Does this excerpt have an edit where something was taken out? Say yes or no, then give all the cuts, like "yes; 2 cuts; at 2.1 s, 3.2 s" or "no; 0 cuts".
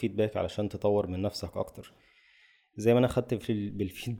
no; 0 cuts